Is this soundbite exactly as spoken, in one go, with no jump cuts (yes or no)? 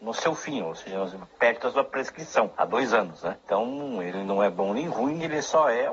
yes